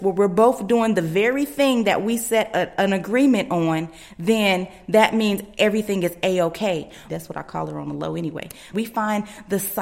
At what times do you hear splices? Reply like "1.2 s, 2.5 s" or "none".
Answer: 7.1 s, 8.7 s